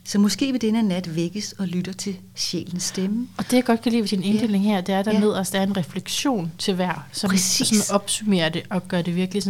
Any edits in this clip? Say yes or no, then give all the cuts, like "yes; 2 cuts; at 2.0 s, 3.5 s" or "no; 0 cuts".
no; 0 cuts